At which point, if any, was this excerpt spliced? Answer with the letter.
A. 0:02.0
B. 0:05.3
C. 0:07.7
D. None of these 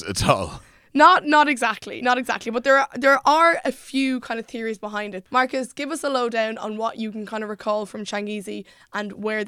D